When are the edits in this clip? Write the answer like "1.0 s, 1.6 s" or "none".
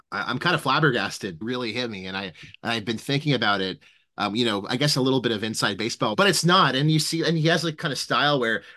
1.4 s, 6.1 s